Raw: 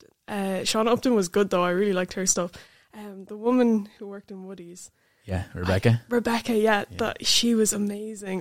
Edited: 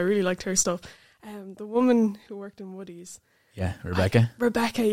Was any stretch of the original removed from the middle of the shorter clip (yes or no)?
no